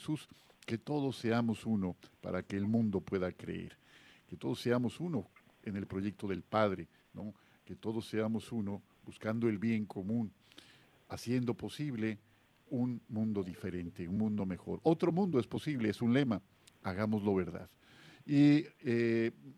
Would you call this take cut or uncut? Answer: uncut